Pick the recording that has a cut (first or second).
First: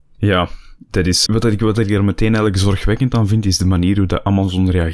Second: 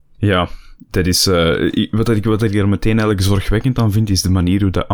first